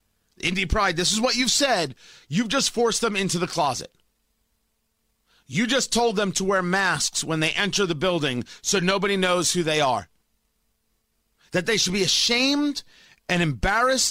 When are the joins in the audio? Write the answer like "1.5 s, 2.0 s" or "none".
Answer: none